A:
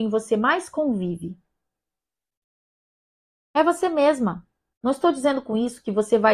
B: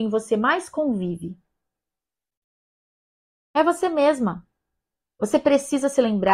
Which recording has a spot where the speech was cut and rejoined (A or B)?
A